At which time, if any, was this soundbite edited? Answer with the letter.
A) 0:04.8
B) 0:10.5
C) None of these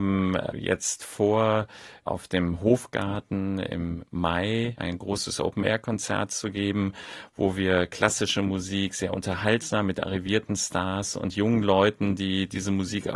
A